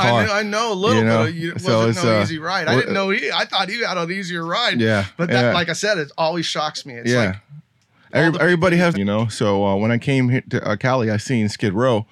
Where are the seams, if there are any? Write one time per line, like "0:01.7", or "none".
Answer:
0:08.9